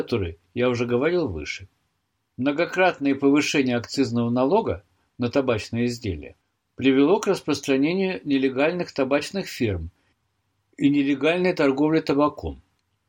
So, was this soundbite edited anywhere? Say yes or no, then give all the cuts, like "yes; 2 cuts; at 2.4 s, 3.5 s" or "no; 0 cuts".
yes; 1 cut; at 2.2 s